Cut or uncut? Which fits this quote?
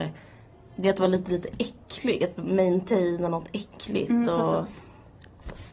uncut